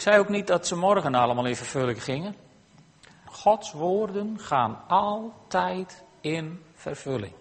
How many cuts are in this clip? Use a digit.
1